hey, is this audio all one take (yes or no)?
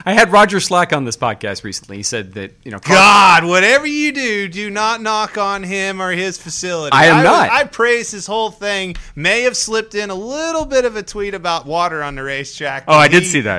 yes